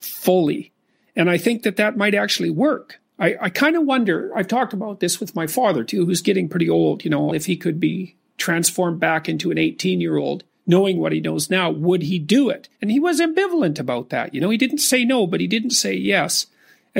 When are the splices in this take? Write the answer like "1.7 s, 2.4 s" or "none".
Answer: 7.3 s, 12.7 s